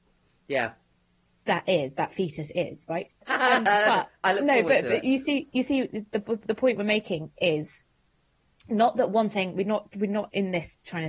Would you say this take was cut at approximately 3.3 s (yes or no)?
yes